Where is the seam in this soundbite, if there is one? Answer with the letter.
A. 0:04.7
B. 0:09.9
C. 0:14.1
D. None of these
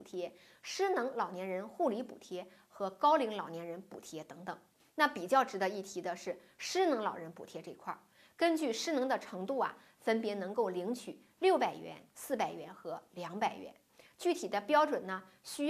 D